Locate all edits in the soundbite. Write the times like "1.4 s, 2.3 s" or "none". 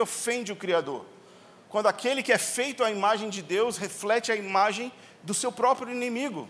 none